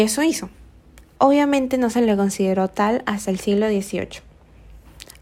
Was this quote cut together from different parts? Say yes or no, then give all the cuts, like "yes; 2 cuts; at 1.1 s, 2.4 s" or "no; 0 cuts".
yes; 1 cut; at 1.2 s